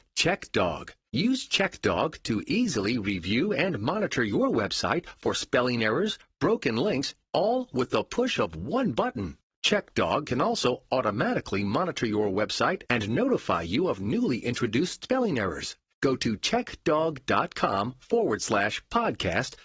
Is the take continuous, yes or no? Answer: no